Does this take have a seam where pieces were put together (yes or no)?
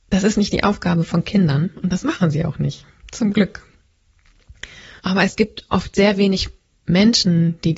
yes